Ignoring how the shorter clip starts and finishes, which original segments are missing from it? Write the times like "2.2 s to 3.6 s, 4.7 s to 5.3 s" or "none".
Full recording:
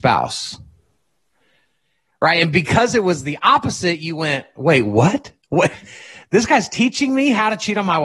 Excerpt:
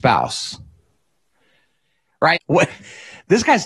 2.3 s to 5.4 s

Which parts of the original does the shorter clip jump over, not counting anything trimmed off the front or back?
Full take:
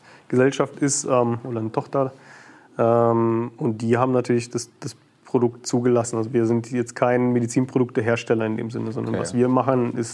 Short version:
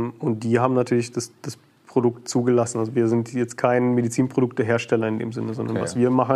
none

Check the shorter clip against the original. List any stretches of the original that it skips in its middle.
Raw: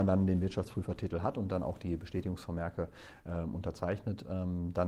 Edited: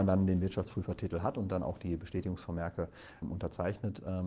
3.2 s to 3.4 s

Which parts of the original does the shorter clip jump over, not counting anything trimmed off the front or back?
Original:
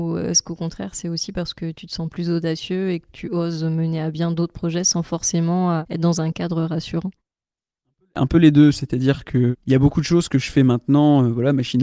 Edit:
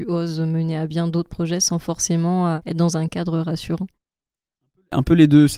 none

